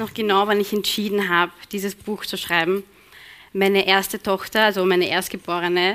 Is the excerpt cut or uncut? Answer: uncut